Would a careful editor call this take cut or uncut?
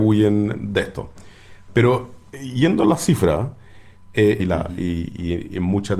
cut